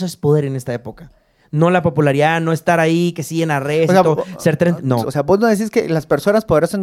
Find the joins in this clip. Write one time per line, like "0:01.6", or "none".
0:05.0